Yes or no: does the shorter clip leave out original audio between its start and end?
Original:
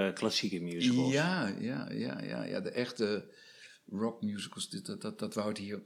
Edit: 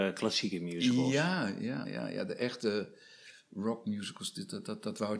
yes